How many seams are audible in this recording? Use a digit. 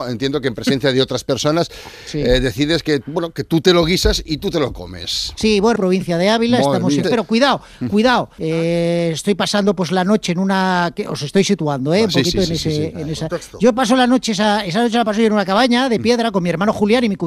3